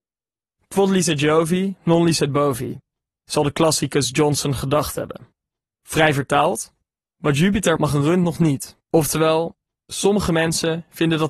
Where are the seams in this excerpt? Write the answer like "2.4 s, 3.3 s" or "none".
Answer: 7.8 s, 8.8 s